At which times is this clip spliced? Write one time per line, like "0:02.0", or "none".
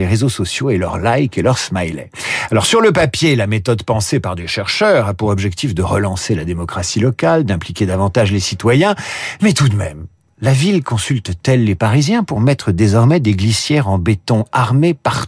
none